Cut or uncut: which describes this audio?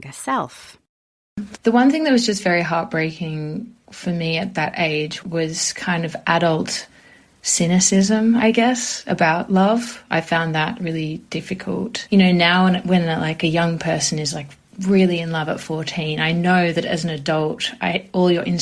cut